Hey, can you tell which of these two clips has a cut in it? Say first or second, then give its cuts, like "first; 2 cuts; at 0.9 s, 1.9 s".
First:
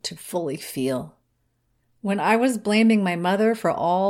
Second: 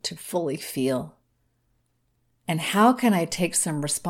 first; 1 cut; at 1.8 s